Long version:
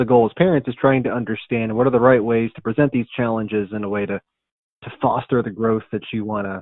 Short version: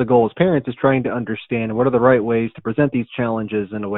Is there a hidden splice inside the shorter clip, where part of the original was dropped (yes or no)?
no